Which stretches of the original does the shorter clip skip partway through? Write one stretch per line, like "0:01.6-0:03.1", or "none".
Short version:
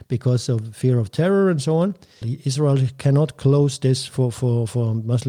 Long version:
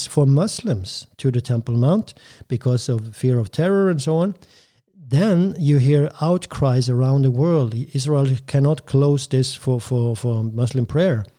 0:04.6-0:07.7